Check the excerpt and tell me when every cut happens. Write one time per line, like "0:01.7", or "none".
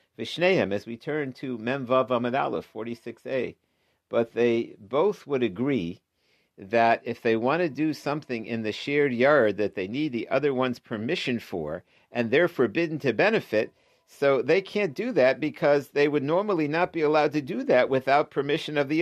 none